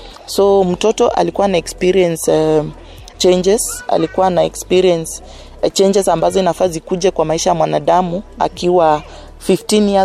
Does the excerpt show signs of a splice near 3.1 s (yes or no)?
yes